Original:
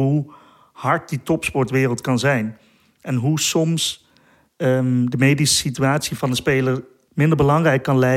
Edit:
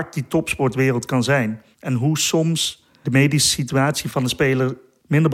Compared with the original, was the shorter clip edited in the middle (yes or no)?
yes